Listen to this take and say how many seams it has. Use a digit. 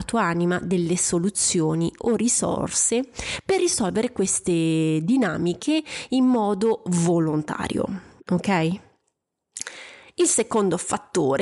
0